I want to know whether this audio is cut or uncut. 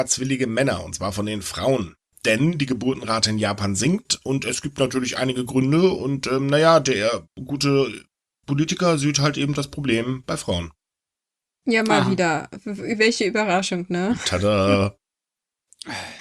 uncut